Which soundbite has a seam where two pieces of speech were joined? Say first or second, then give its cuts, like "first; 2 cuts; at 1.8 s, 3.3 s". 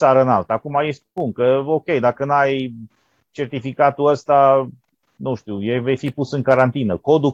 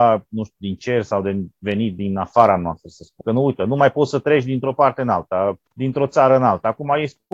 second; 2 cuts; at 3.2 s, 5.7 s